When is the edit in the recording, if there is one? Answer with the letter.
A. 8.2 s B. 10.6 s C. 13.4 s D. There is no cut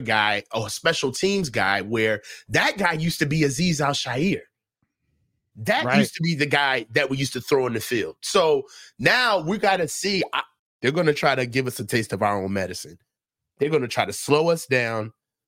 B